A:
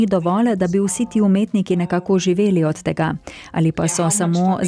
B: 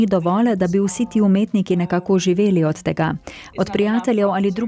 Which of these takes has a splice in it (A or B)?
B